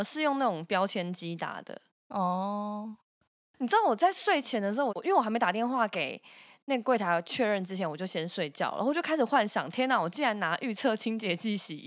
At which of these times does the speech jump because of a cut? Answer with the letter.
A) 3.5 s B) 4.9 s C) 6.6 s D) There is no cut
B